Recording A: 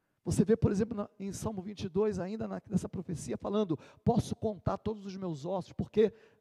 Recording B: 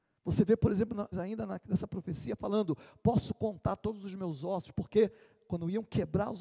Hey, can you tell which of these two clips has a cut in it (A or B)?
B